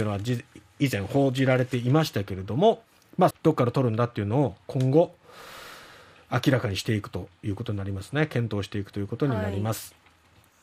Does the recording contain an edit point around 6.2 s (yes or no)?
no